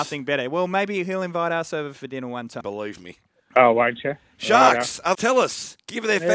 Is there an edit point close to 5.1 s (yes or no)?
yes